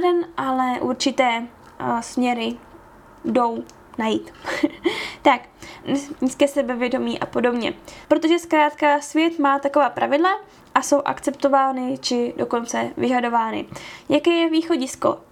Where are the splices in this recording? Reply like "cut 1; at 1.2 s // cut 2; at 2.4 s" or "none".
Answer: cut 1; at 6.2 s // cut 2; at 8.0 s